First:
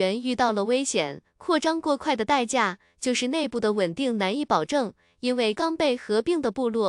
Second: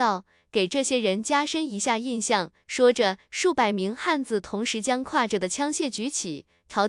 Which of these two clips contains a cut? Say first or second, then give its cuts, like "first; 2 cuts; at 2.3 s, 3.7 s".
first; 1 cut; at 5.6 s